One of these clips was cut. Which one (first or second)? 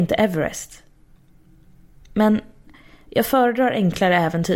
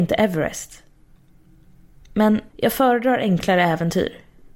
second